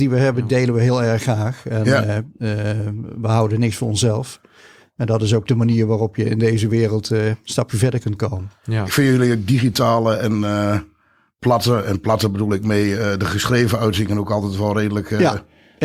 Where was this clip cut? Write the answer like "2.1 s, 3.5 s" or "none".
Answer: none